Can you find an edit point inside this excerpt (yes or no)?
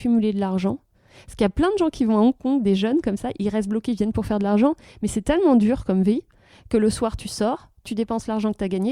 no